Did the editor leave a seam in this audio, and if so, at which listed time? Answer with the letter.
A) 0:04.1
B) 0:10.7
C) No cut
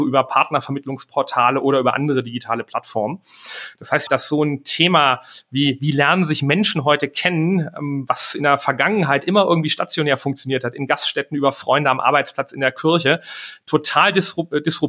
A